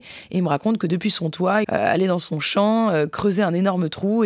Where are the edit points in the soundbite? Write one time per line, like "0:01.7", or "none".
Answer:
0:01.6